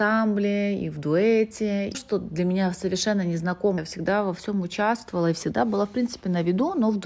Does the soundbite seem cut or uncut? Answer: cut